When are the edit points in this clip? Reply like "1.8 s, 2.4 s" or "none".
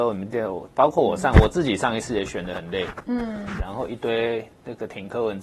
3.6 s